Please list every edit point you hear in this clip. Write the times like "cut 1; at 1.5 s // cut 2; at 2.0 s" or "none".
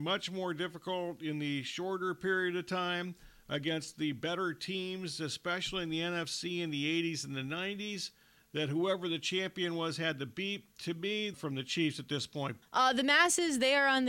cut 1; at 11.3 s // cut 2; at 12.6 s

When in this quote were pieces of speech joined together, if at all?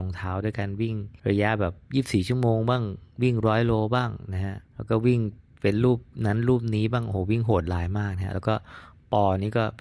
cut 1; at 1.2 s // cut 2; at 4.6 s

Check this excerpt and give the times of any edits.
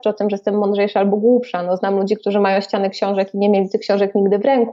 none

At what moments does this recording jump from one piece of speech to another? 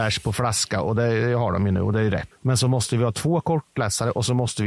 cut 1; at 2.3 s

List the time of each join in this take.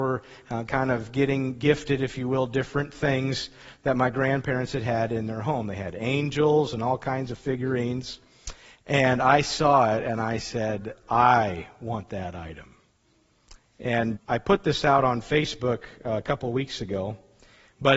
cut 1; at 8.7 s // cut 2; at 14.2 s

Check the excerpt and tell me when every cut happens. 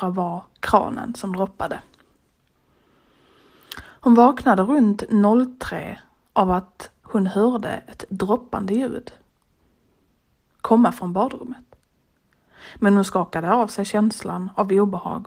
cut 1; at 3.8 s

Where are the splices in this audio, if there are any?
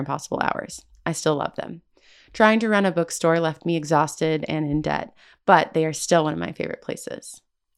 none

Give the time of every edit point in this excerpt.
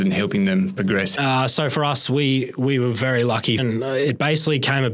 cut 1; at 1.1 s // cut 2; at 3.6 s

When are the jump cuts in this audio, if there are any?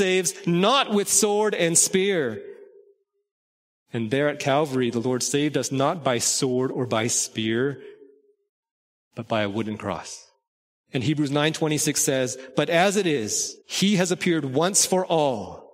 cut 1; at 10.8 s // cut 2; at 13.6 s

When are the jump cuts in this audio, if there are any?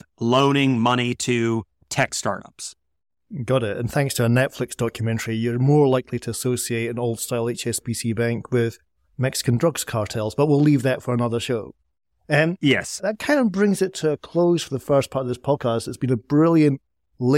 none

